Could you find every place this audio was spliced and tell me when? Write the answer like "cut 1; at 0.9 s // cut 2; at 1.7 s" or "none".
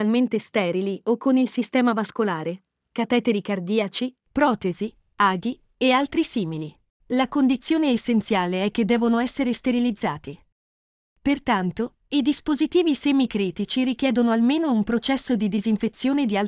cut 1; at 2.8 s // cut 2; at 4.2 s // cut 3; at 11.1 s

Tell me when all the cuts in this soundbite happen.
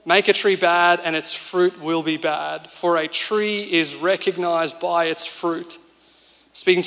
none

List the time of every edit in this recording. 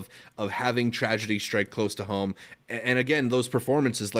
none

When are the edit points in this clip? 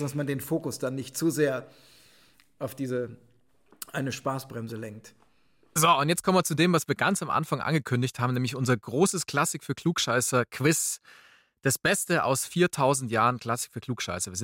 none

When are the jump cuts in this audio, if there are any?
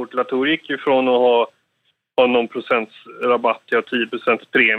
none

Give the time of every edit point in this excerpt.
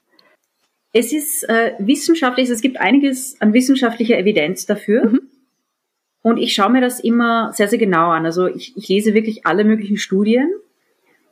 none

